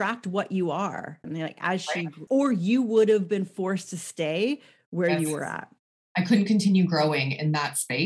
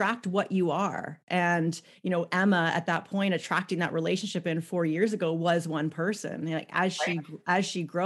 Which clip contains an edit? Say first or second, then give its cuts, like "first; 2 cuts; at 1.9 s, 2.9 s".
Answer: first; 2 cuts; at 1.2 s, 2.3 s